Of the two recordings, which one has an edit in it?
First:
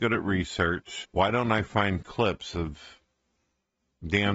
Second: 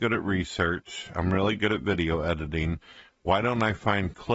first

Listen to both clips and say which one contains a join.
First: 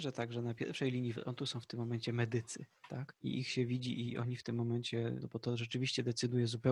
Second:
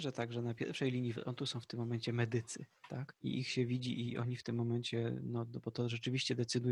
first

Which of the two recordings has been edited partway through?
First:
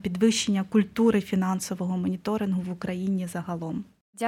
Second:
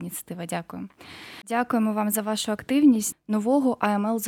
second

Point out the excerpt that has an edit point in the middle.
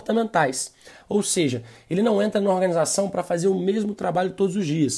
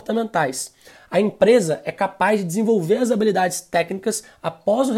first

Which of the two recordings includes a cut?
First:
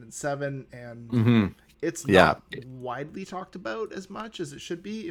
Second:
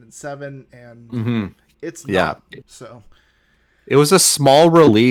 second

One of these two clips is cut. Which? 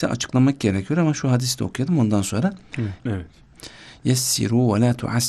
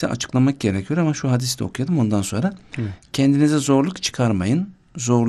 first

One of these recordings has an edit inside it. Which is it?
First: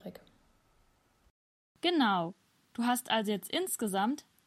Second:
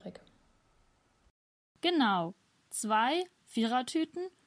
second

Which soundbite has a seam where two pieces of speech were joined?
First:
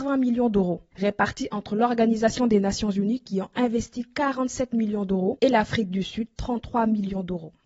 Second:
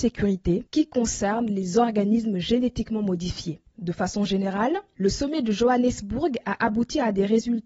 second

